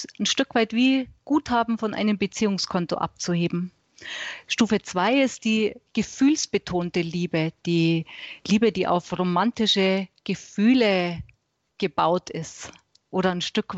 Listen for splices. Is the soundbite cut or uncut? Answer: cut